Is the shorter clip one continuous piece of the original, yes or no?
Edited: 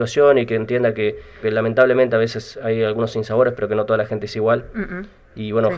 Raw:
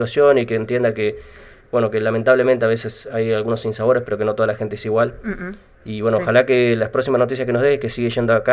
no